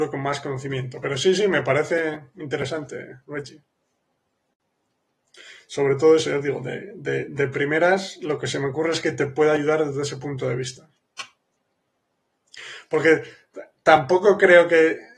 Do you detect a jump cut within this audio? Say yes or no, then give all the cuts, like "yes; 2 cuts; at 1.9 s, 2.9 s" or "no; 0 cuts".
no; 0 cuts